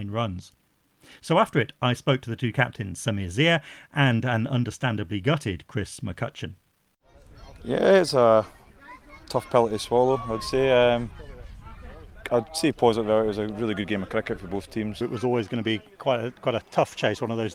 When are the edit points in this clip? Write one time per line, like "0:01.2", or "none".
0:15.0